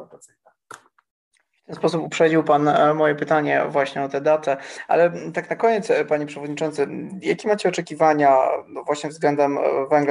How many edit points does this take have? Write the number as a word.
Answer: zero